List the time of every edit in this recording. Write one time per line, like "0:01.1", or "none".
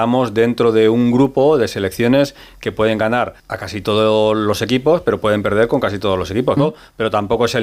0:03.4
0:06.6